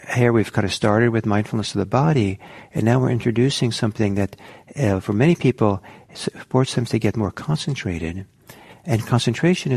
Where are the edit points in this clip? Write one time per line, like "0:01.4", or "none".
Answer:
0:08.7